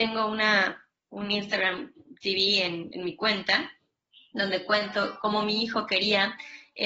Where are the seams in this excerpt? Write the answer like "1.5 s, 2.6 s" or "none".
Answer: 2.9 s